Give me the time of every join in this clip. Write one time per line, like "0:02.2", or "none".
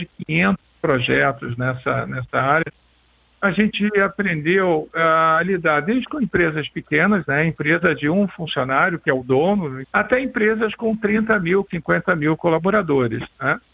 0:07.3
0:09.8
0:11.7